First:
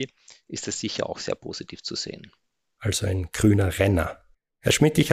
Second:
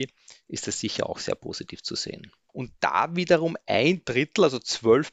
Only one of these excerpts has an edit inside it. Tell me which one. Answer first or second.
second